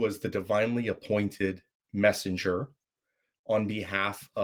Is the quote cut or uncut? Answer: uncut